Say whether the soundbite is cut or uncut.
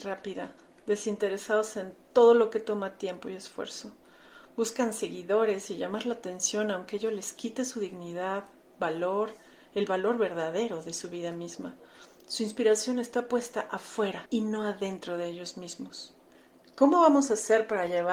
uncut